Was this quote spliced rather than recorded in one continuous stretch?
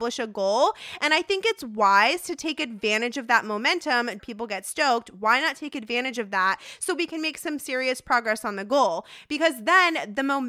yes; 1 cut; at 4.2 s

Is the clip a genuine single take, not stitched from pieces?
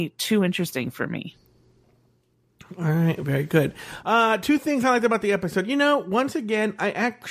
yes; 0 cuts

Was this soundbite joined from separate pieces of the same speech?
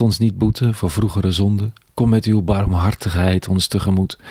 no; 0 cuts

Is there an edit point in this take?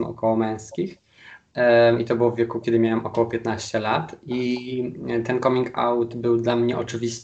no; 0 cuts

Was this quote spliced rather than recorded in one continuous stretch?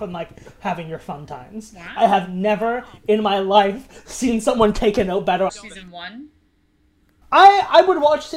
yes; 1 cut; at 5.5 s

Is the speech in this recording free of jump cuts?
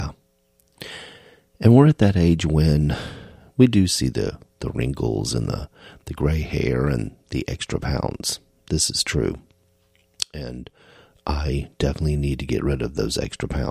yes; 0 cuts

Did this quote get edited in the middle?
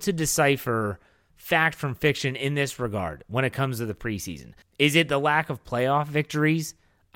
yes; 1 cut; at 4.6 s

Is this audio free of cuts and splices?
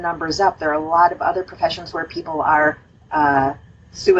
yes; 0 cuts

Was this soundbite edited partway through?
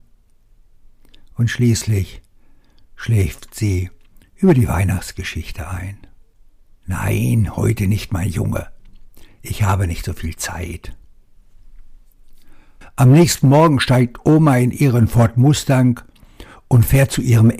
yes; 2 cuts; at 6.8 s, 12.8 s

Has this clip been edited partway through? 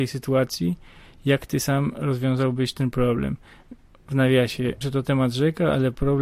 yes; 1 cut; at 4.8 s

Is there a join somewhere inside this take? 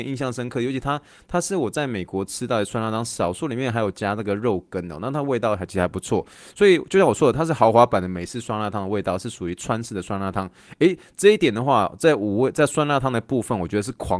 no; 0 cuts

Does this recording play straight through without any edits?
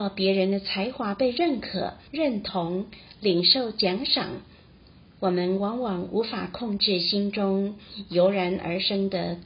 no; 1 cut; at 2.1 s

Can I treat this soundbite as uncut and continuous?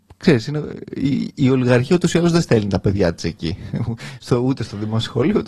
yes; 0 cuts

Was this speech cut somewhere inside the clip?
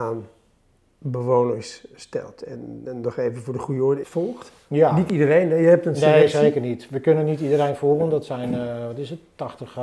yes; 1 cut; at 4.0 s

